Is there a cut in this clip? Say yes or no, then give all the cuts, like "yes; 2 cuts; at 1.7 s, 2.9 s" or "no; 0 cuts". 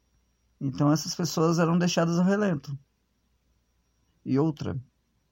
yes; 1 cut; at 4.1 s